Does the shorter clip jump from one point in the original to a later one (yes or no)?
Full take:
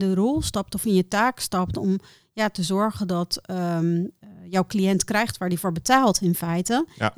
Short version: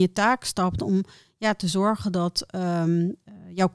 no